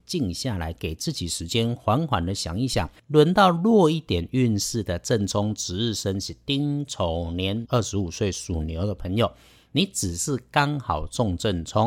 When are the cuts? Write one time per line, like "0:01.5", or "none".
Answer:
0:03.0
0:07.7